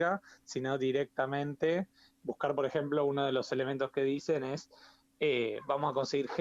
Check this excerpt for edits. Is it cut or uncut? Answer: uncut